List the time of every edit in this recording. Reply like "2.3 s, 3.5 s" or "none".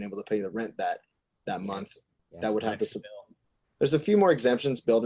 3.6 s